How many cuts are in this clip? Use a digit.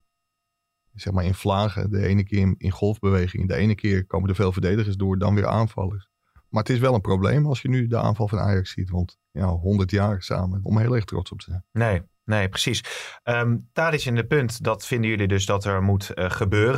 1